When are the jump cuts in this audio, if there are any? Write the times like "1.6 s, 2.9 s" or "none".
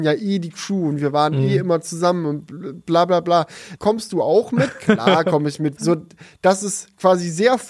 3.8 s, 5.8 s